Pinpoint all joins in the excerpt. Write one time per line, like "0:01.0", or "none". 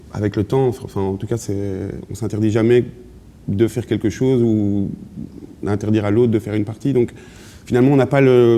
none